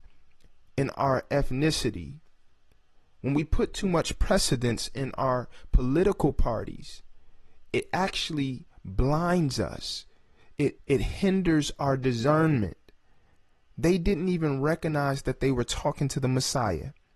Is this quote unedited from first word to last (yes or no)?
no